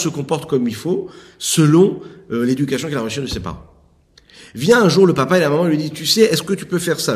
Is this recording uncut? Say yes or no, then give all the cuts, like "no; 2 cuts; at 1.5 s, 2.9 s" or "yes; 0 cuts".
yes; 0 cuts